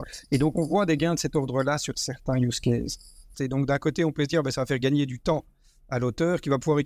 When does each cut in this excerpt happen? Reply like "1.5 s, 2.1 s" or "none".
3.3 s